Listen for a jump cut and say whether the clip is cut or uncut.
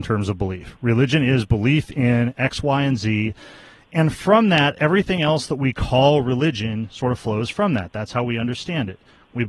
uncut